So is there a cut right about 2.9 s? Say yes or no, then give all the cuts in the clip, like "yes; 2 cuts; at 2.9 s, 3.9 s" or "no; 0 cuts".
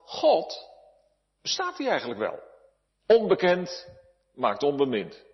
yes; 1 cut; at 2.9 s